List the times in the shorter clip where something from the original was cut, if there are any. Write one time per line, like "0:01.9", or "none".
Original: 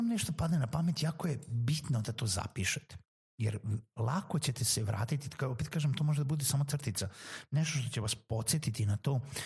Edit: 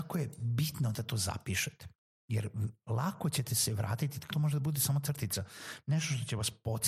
0:04.3

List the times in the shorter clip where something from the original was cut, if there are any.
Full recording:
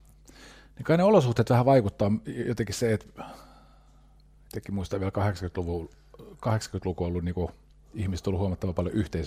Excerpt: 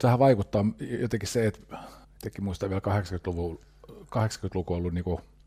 0:02.0

